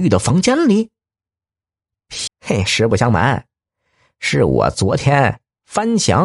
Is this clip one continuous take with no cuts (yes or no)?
no